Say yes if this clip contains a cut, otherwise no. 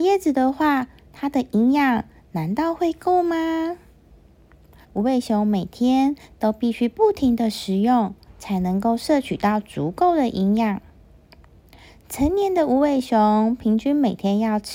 yes